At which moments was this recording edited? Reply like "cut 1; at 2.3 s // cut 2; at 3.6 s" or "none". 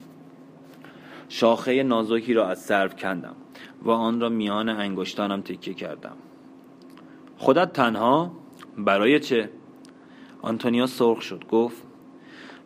cut 1; at 5.4 s